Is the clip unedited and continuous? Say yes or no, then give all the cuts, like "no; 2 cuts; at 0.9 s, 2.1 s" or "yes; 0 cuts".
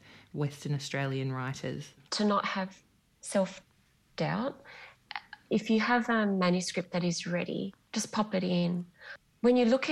no; 2 cuts; at 2.1 s, 7.8 s